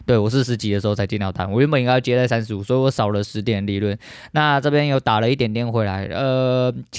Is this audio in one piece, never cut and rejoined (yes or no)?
yes